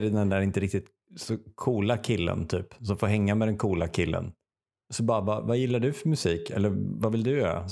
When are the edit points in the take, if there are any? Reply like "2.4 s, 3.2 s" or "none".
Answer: none